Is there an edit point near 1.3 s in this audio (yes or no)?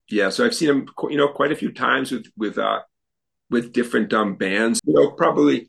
no